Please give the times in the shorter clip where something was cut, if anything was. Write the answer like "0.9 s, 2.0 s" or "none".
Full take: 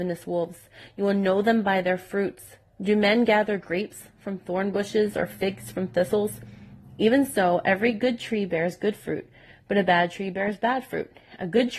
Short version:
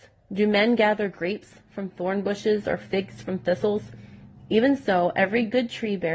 none

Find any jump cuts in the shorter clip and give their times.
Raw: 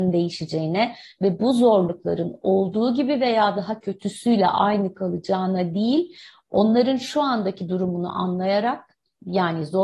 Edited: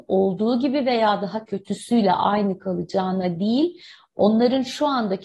none

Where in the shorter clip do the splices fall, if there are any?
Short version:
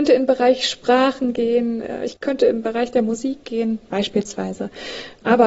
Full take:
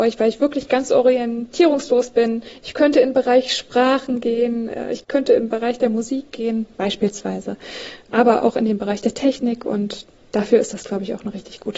none

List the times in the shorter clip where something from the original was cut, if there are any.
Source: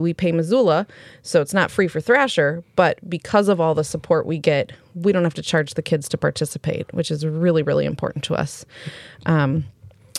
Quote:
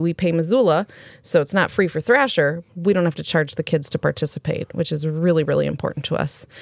2.7 s

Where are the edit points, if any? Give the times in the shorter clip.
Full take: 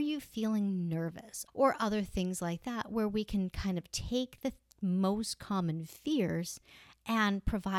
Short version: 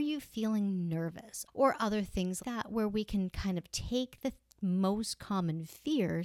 2.4 s

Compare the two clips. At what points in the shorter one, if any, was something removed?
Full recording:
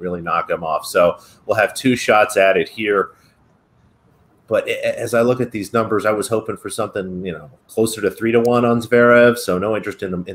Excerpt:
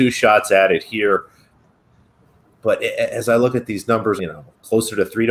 4.2 s

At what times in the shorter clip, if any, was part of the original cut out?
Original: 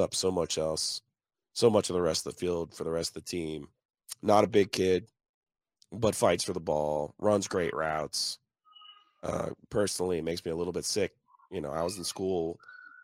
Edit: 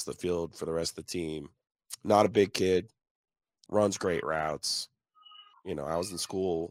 3.7 s, 5.5 s

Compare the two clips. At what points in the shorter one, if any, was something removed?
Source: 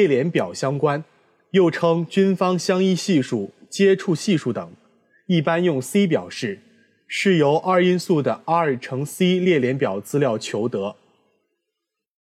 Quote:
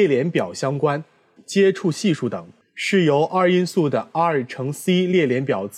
1.4 s, 2.6 s

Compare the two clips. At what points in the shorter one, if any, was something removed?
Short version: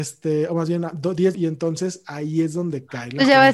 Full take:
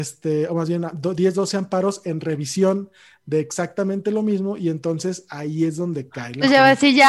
1.3 s

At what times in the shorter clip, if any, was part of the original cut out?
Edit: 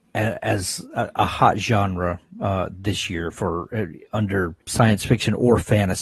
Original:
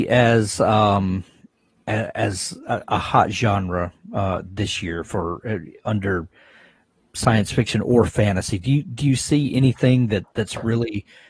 4.6 s

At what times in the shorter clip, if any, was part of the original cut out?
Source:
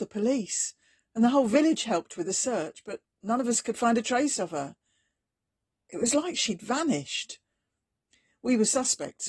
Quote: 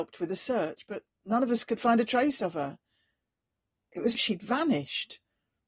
4.1 s

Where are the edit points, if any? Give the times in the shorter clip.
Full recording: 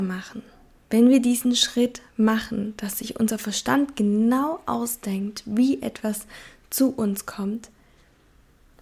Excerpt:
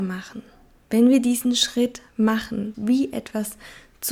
2.7 s

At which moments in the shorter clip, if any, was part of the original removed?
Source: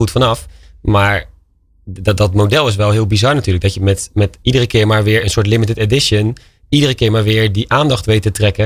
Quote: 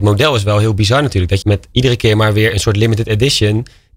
1.4 s

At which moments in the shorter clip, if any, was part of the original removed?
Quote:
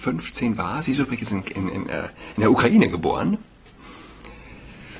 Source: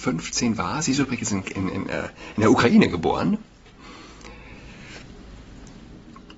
none

